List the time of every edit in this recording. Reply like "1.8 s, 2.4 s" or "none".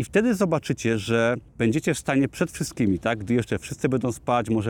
1.5 s